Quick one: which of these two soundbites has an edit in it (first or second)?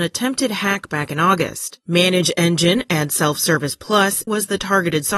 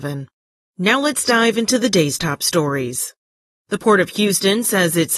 first